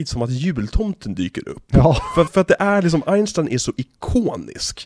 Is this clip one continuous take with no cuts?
no; 1 cut; at 2.3 s

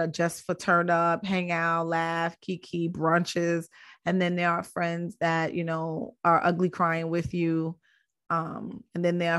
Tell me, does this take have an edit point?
no; 0 cuts

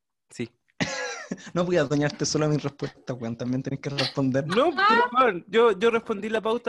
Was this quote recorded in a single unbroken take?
yes; 0 cuts

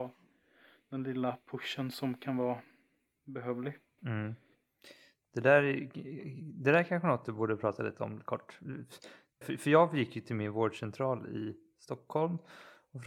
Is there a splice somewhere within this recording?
yes; 2 cuts; at 4.0 s, 9.4 s

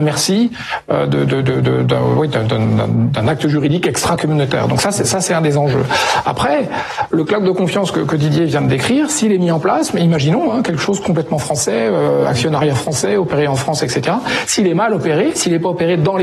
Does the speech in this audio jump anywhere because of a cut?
no; 0 cuts

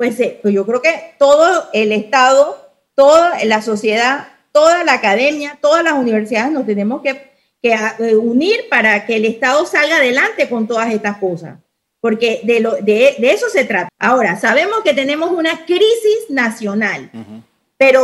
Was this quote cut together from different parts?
yes; 1 cut; at 13.9 s

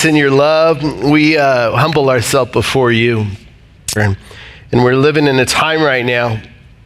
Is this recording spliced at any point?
yes; 1 cut; at 4.0 s

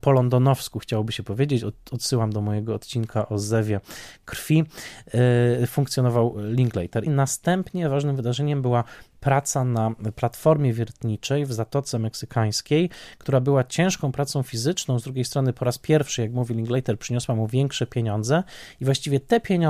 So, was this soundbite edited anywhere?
yes; 1 cut; at 7.1 s

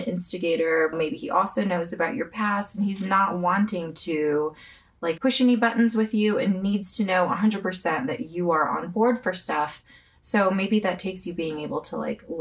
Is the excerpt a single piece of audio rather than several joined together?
no; 2 cuts; at 0.9 s, 5.2 s

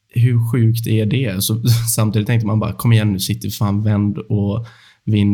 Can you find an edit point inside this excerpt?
no; 0 cuts

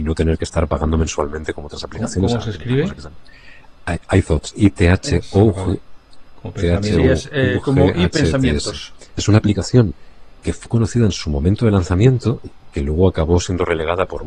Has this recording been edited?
yes; 2 cuts; at 9.1 s, 10.7 s

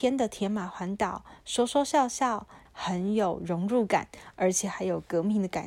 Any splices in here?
yes; 1 cut; at 2.7 s

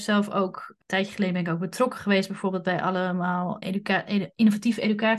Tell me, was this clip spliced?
yes; 1 cut; at 3.6 s

